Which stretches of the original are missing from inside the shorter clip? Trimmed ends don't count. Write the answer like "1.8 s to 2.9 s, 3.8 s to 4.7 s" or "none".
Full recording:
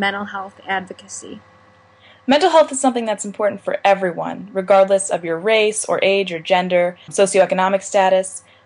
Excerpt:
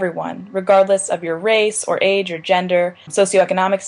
none